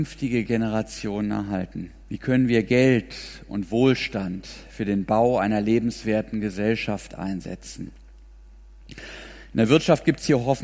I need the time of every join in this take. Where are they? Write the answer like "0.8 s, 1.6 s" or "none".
2.0 s